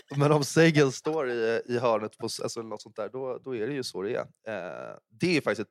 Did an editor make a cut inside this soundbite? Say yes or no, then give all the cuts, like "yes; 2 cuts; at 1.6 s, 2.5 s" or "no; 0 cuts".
no; 0 cuts